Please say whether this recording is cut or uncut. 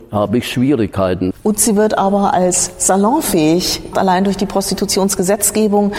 cut